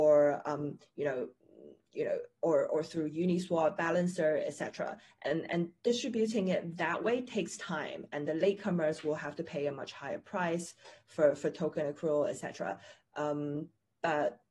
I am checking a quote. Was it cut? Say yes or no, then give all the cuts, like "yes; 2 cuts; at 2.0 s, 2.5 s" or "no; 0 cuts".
no; 0 cuts